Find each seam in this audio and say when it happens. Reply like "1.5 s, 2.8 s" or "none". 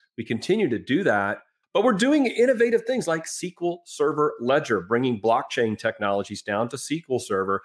1.6 s